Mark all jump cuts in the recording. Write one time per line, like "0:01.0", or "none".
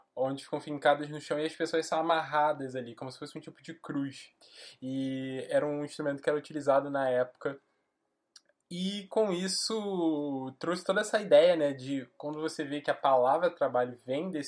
none

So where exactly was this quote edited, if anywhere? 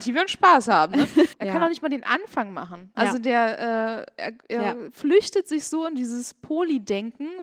0:01.3
0:02.9

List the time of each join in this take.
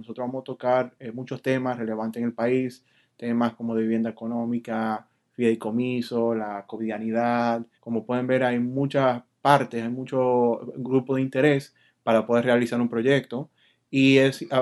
0:07.7

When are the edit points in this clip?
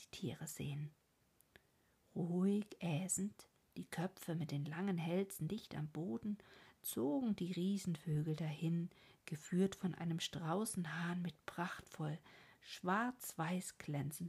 none

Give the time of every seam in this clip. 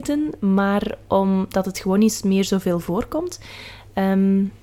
none

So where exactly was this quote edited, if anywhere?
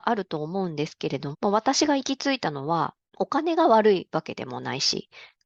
0:01.3
0:03.1

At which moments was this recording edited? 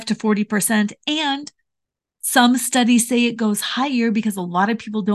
none

